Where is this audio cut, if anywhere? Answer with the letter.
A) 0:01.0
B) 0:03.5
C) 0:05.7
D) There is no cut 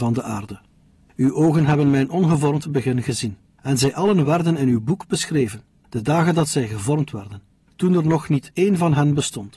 D